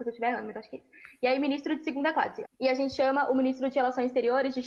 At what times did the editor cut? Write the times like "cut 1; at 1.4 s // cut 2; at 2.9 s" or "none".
cut 1; at 2.4 s